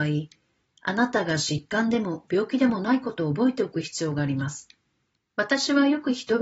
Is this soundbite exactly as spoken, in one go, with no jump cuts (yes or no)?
no